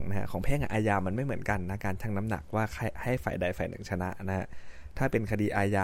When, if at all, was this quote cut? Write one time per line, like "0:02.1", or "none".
none